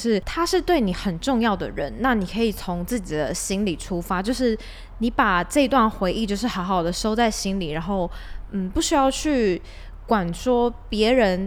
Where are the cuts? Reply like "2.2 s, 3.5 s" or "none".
none